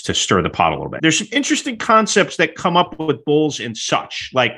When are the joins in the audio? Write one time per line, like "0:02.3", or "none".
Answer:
0:01.0